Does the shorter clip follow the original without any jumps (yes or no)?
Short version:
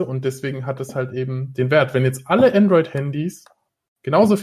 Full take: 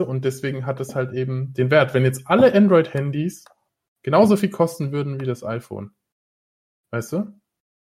yes